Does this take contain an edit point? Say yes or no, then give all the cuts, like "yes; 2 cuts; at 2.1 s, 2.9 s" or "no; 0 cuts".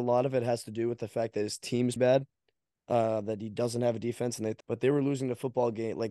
yes; 2 cuts; at 2.0 s, 4.6 s